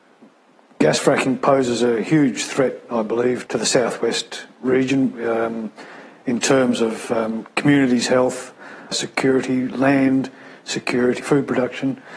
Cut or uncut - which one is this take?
cut